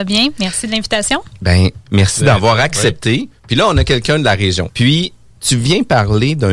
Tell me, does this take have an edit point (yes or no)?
yes